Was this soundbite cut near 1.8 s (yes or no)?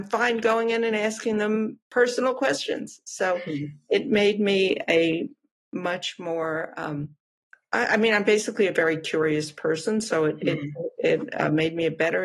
yes